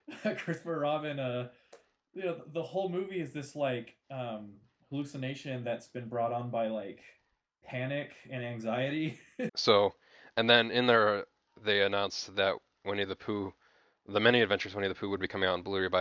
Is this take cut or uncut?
cut